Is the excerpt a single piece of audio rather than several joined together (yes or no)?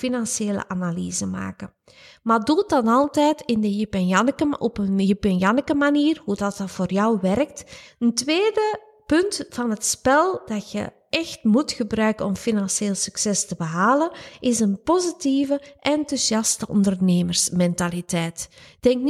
no